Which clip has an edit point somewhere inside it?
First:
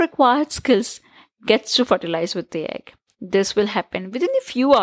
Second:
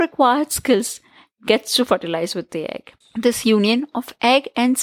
second; 1 cut; at 3.0 s

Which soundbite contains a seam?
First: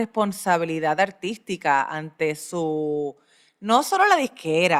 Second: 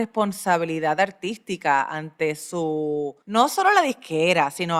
second; 1 cut; at 3.2 s

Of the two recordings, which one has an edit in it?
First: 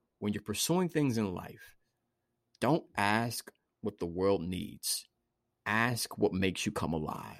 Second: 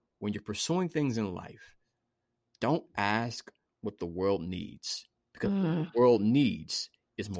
second; 1 cut; at 5.2 s

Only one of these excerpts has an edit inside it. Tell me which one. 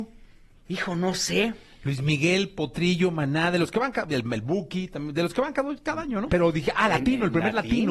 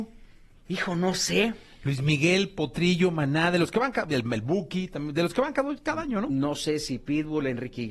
first; 1 cut; at 6.3 s

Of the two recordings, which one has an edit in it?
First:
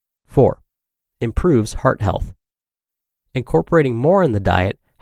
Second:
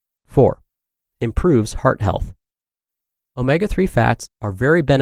first; 1 cut; at 3.2 s

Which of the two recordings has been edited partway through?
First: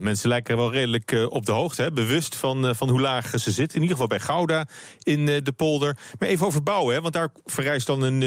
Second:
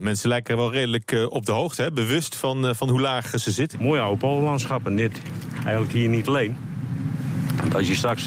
second; 1 cut; at 3.7 s

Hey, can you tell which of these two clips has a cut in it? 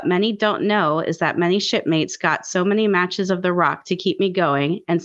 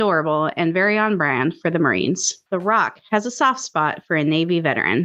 second; 1 cut; at 2.5 s

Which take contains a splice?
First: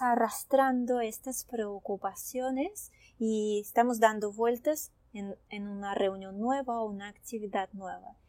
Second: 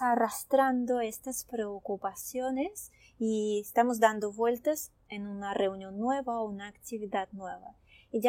second; 1 cut; at 5.0 s

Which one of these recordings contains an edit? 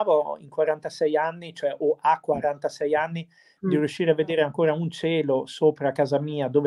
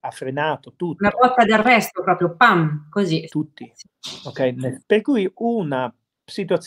second; 2 cuts; at 3.3 s, 4.8 s

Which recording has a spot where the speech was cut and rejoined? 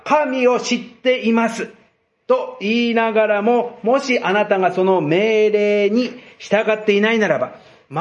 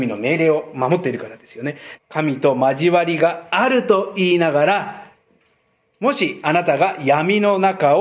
second; 1 cut; at 2.0 s

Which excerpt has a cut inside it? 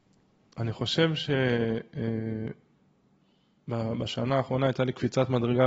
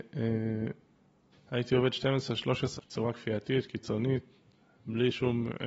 second; 2 cuts; at 1.3 s, 2.8 s

